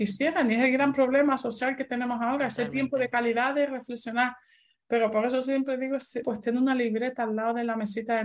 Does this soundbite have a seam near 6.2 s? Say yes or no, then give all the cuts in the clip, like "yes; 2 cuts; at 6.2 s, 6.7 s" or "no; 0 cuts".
yes; 1 cut; at 6.2 s